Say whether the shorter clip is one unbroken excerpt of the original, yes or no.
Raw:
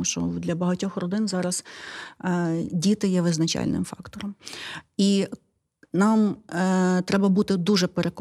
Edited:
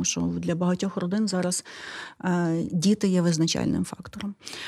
yes